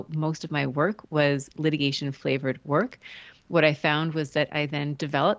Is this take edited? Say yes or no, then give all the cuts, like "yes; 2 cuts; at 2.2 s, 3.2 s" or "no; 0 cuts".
no; 0 cuts